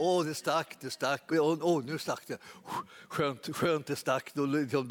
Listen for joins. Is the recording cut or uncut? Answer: cut